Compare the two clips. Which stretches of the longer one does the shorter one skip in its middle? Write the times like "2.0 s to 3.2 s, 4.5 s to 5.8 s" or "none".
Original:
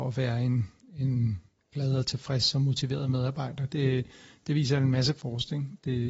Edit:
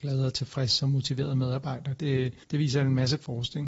4.2 s to 4.4 s